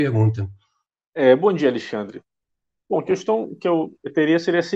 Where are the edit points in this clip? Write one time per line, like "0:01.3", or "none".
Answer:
none